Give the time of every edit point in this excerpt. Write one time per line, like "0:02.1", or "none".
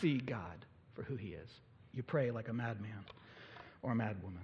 0:01.9